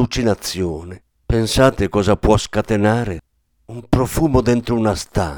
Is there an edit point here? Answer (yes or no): yes